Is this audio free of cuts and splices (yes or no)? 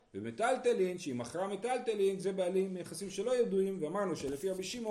yes